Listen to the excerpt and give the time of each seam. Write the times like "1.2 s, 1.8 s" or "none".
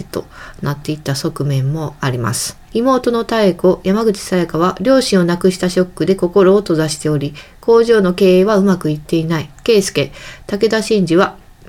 2.7 s, 9.5 s